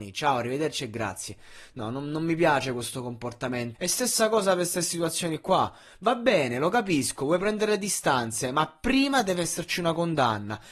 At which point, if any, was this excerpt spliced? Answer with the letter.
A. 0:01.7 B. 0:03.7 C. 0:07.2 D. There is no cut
B